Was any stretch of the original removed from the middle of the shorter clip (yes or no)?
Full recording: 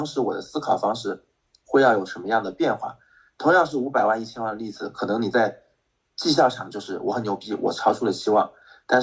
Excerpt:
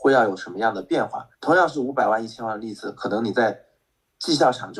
yes